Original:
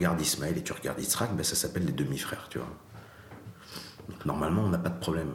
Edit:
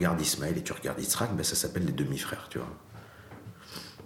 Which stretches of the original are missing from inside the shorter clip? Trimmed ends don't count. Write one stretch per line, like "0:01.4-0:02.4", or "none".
none